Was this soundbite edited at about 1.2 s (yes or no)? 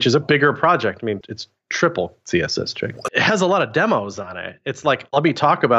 yes